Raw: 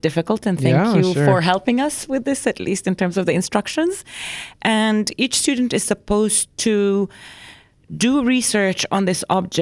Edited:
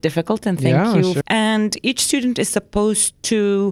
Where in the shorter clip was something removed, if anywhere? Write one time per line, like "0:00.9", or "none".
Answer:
0:01.2